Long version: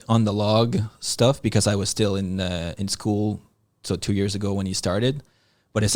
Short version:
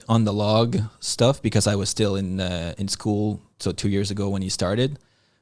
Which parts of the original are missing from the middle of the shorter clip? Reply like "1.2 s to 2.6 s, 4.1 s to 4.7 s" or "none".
3.5 s to 3.7 s